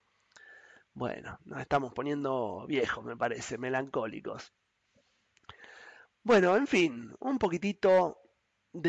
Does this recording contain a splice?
no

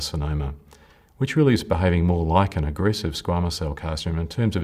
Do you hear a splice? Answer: no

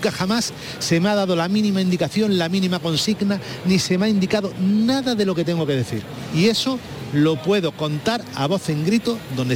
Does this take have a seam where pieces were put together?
no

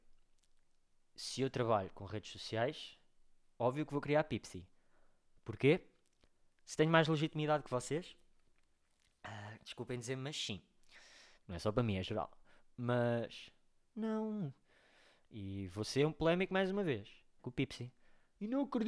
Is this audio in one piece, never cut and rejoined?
no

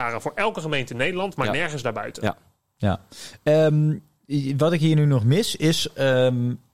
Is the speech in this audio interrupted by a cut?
no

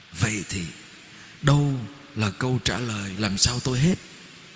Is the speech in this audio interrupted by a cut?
yes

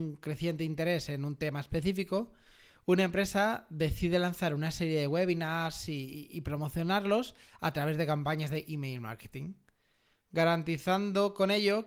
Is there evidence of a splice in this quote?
no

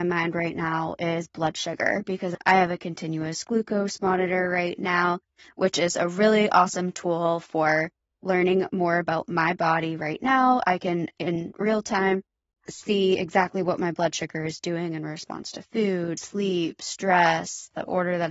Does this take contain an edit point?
no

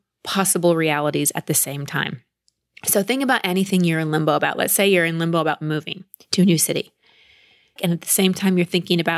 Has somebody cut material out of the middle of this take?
yes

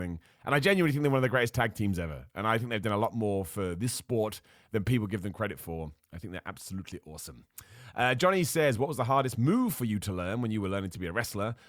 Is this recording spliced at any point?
no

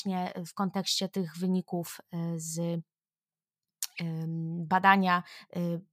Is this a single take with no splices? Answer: yes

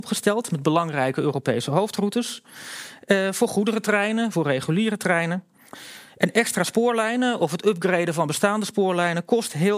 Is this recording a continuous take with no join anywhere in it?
no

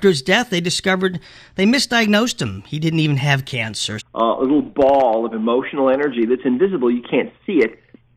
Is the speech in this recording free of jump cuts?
no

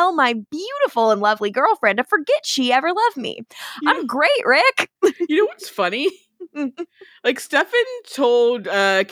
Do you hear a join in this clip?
no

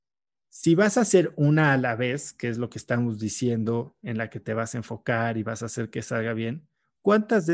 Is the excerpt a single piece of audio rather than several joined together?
yes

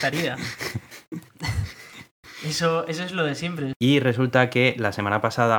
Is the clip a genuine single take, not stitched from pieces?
no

